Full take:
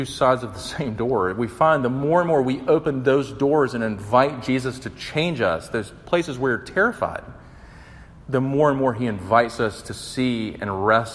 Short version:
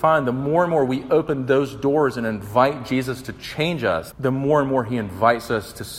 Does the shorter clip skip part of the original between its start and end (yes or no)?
yes